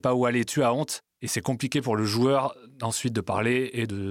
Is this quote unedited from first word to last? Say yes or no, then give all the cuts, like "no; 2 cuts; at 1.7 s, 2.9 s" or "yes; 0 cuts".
yes; 0 cuts